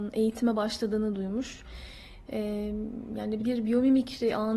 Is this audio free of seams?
no; 1 cut; at 3.4 s

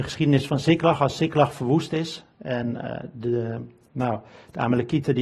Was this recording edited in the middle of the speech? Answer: no; 0 cuts

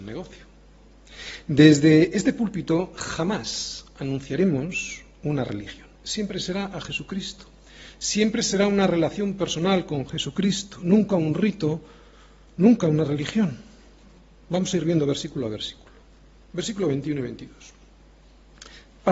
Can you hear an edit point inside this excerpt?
no; 0 cuts

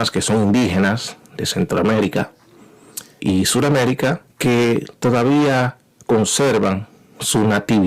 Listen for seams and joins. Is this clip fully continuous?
no; 2 cuts; at 3.2 s, 4.3 s

